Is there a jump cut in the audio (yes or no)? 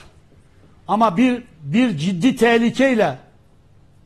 no